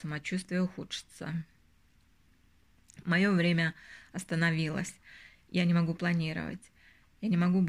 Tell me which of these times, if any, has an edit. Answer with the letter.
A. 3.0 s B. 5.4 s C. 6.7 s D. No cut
D